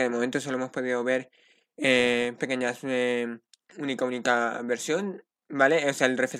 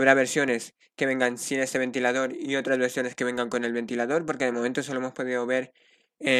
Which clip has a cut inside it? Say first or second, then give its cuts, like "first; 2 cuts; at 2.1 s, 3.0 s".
first; 2 cuts; at 2.4 s, 3.7 s